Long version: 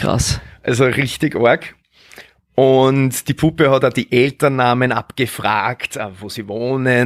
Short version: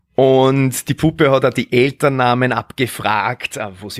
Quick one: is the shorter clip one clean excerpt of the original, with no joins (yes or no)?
yes